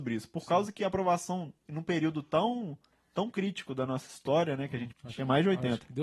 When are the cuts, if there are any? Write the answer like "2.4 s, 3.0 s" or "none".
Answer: 1.7 s, 4.9 s